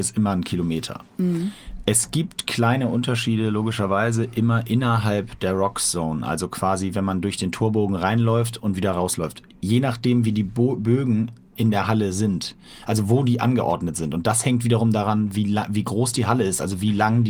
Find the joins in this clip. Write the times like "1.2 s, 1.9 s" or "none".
none

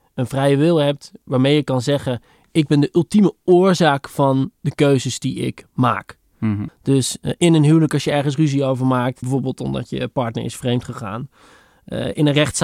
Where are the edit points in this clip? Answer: 6.7 s, 9.2 s

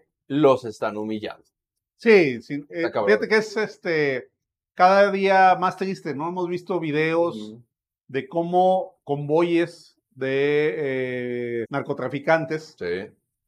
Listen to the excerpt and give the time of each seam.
3.5 s, 11.6 s

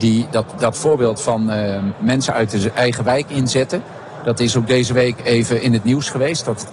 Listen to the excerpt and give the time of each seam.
none

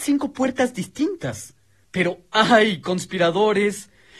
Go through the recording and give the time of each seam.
1.8 s

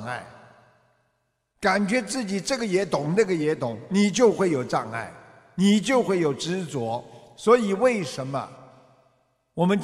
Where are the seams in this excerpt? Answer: none

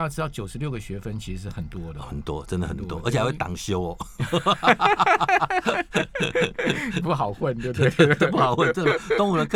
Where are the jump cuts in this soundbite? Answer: none

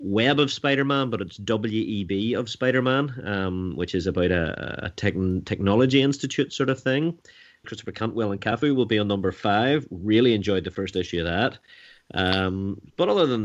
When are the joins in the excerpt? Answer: 7.6 s

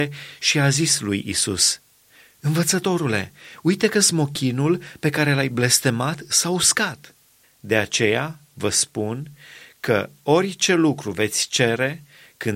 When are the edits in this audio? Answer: 7.4 s

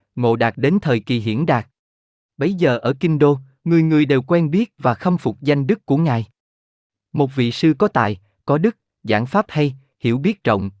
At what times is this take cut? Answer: none

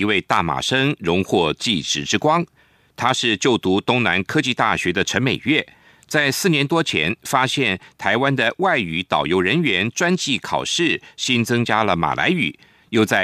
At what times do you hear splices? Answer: none

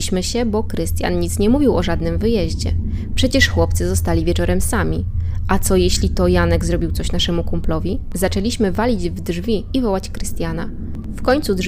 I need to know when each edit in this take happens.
3.1 s

